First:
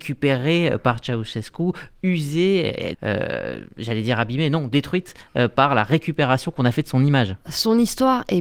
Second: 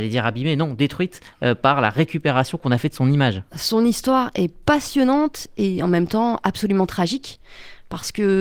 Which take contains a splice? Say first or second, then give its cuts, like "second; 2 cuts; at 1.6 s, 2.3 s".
first; 1 cut; at 2.9 s